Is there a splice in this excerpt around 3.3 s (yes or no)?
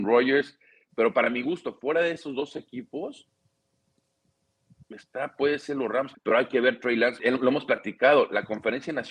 no